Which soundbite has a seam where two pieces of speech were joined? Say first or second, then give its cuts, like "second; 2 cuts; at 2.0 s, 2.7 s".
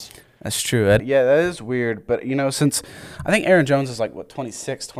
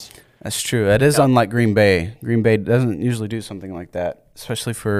first; 1 cut; at 1.0 s